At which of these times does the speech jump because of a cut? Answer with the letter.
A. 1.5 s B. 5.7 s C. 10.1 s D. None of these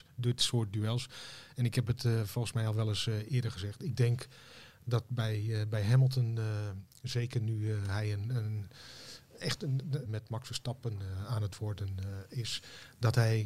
C